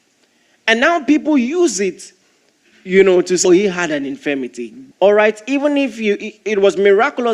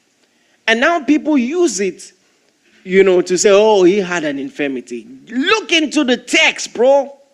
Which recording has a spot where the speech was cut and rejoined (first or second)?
first